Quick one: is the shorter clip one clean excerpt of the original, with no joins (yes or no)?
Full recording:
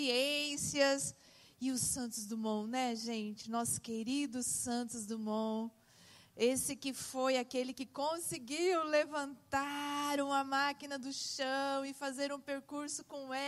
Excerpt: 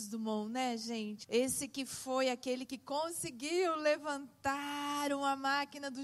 no